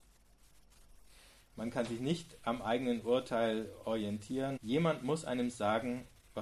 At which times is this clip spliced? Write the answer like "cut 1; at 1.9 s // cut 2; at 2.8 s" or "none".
cut 1; at 1.4 s // cut 2; at 4.6 s